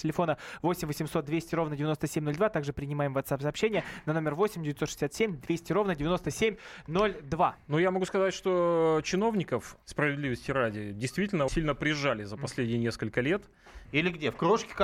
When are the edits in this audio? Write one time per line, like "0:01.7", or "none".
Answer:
0:09.8
0:11.5
0:13.8

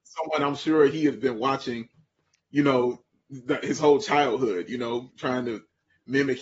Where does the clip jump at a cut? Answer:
0:05.1

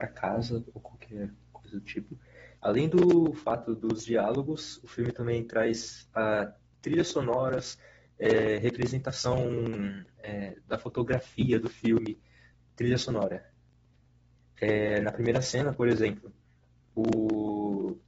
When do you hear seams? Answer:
0:02.6

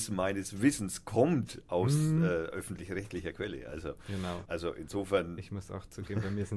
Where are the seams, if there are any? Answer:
0:04.5

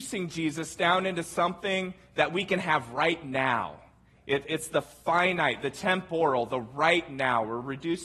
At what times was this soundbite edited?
none

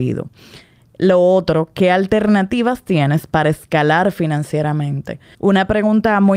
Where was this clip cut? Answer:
0:05.3

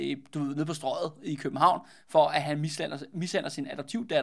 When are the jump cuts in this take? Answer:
none

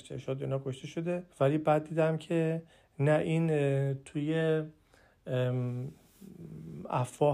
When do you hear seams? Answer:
0:01.3

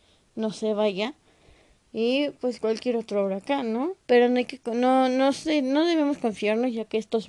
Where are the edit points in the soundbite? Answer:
0:01.8
0:04.1

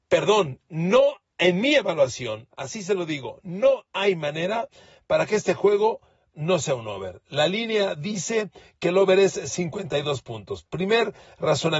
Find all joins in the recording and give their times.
0:02.5

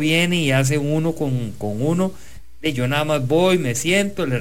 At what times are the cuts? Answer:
none

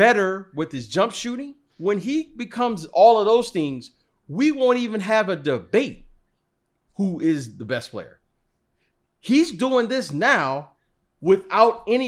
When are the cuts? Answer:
0:01.7

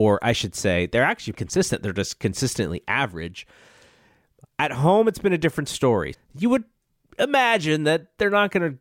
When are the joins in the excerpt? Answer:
0:01.3
0:06.1

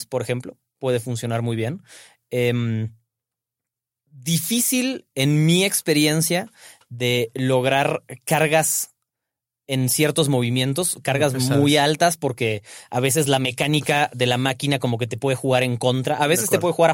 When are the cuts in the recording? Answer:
none

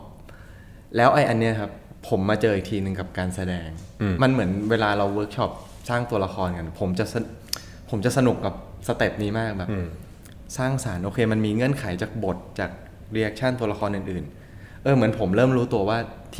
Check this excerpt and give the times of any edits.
0:04.2

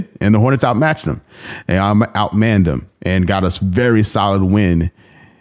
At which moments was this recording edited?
none

